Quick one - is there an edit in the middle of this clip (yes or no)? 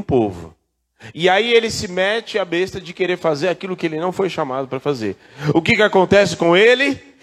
no